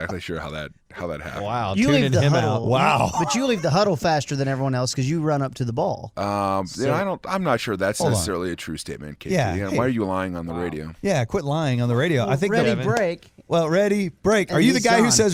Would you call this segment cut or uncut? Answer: uncut